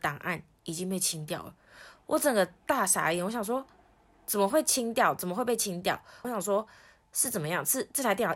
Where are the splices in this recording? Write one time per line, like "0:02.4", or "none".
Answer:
0:06.2